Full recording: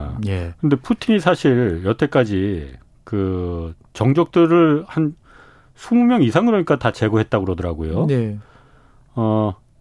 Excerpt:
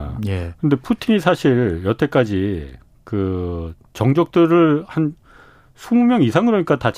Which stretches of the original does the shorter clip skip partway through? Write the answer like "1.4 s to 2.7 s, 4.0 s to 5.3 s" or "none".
none